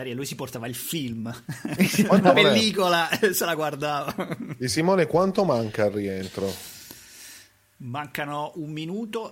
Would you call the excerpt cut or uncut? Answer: cut